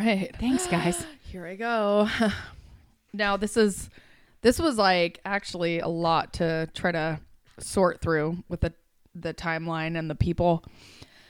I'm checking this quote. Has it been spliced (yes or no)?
no